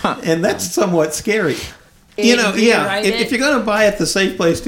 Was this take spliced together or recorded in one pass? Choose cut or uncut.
cut